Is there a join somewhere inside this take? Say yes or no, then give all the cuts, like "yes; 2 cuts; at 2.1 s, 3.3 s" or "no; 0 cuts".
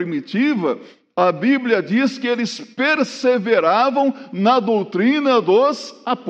no; 0 cuts